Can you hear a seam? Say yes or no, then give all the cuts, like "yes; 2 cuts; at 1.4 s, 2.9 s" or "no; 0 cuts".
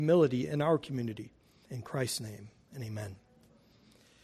yes; 1 cut; at 1.6 s